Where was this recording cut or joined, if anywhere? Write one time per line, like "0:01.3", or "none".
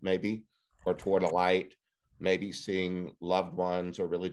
none